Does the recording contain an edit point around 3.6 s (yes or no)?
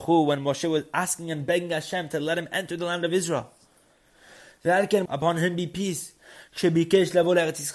no